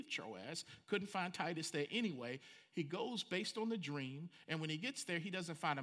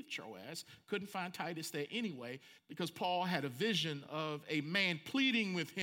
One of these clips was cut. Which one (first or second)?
second